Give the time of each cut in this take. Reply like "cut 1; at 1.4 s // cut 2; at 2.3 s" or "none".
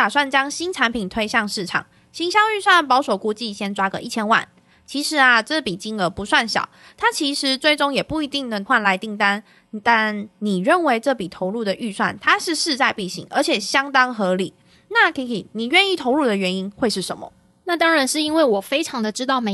none